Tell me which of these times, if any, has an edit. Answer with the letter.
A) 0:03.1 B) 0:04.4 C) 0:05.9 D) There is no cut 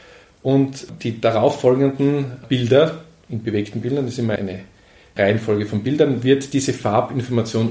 B